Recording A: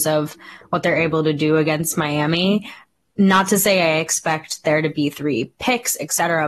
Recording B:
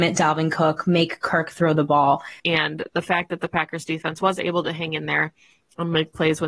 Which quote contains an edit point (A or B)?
B